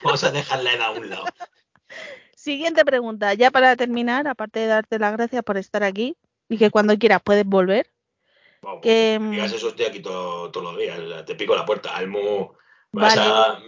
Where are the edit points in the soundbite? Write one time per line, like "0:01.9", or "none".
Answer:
none